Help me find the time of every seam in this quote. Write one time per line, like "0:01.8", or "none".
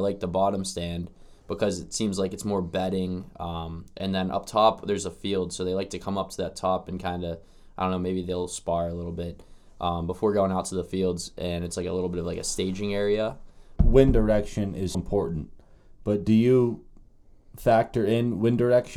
0:13.8
0:14.9